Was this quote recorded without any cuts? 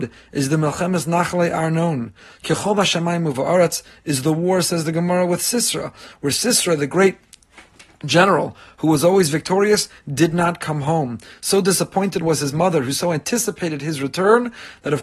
yes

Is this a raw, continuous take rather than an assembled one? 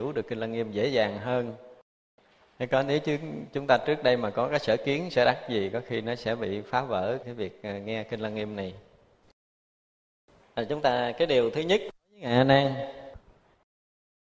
no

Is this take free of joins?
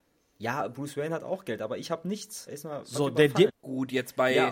no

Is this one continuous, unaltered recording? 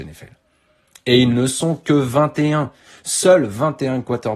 yes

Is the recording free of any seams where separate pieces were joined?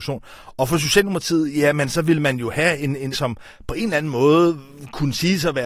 no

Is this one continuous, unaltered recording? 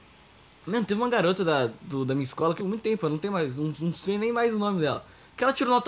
no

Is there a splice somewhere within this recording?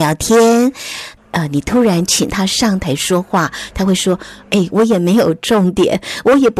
yes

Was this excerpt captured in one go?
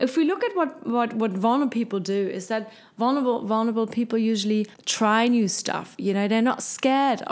no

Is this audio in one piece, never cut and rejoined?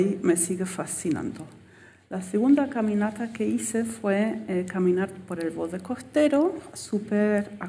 yes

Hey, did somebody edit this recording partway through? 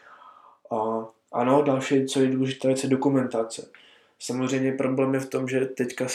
no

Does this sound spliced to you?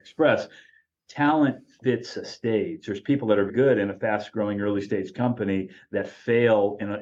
yes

